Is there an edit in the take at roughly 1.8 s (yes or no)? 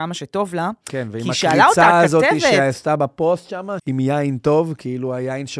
no